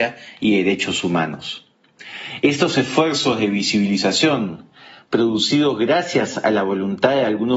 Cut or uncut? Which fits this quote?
uncut